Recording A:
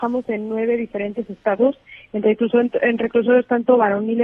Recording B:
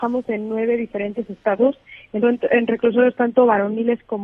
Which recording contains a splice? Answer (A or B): B